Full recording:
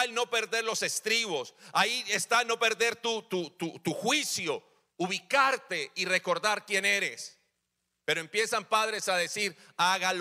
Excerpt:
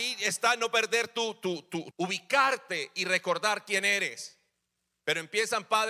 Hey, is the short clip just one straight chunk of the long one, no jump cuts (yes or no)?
no